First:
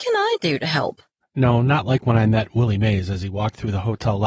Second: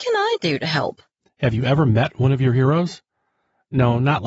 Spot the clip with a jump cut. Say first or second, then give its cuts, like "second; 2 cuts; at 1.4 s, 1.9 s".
first; 1 cut; at 1.2 s